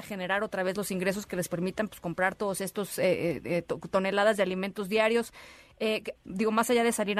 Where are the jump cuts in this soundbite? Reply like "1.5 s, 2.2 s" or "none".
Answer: 6.2 s